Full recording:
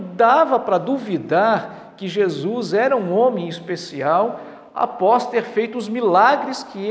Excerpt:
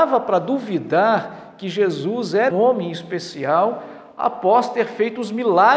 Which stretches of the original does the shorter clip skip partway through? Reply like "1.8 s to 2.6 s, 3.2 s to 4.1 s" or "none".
2.9 s to 3.1 s